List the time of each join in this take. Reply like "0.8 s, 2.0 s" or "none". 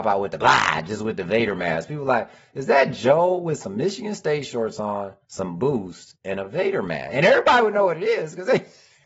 none

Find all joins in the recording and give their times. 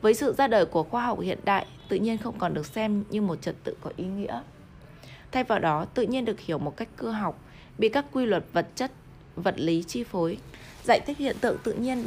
none

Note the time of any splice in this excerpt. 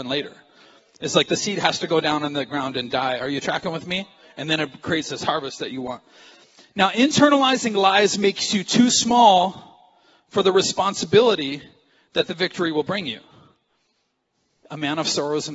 14.6 s

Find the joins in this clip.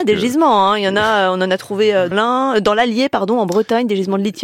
2.1 s

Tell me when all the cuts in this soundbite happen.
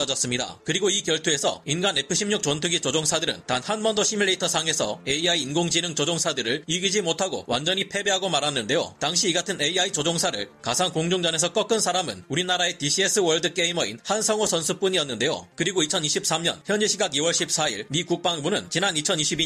15.5 s

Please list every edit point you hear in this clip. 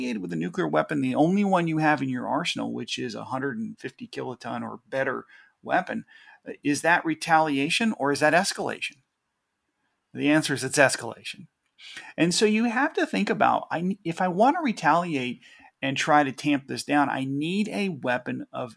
none

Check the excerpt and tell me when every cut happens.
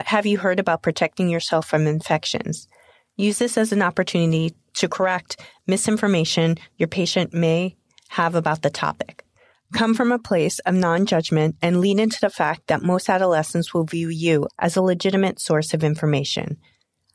14.5 s

